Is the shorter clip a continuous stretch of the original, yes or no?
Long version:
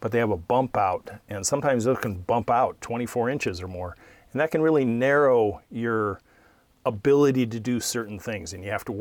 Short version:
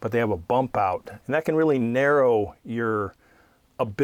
no